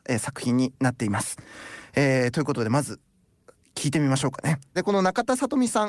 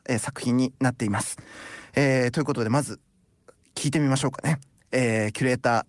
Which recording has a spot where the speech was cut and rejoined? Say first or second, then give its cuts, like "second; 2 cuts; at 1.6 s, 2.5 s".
first; 1 cut; at 4.8 s